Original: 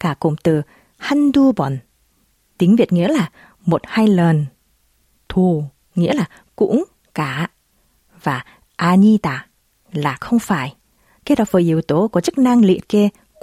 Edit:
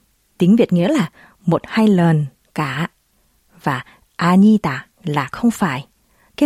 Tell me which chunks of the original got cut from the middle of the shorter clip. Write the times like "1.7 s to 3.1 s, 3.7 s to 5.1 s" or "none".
4.6 s to 7.0 s, 9.5 s to 9.8 s